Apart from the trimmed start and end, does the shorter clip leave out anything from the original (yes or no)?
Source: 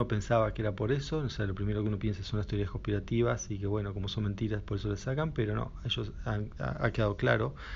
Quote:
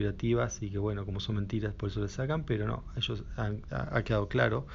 no